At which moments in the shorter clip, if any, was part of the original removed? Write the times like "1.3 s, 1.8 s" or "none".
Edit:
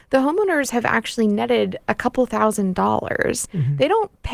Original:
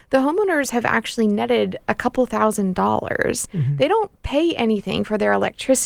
none